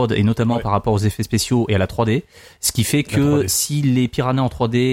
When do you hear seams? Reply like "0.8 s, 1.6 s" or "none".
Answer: none